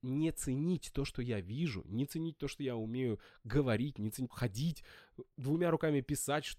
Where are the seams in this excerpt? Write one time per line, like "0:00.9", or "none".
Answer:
0:04.3